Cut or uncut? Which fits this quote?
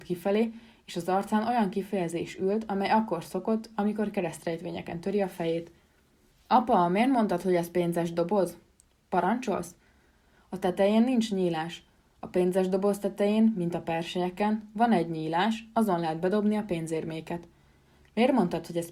uncut